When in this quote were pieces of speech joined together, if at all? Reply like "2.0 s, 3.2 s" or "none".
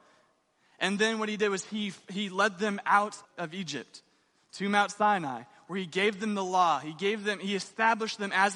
3.2 s